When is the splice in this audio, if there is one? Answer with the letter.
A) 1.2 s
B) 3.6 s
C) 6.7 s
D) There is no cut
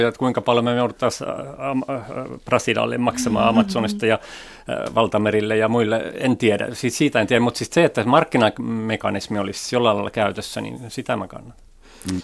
D